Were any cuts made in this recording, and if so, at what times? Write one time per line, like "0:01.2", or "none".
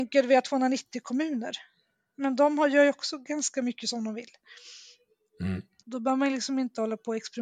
0:05.8